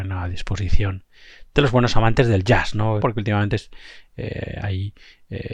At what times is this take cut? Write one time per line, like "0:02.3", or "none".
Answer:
0:03.0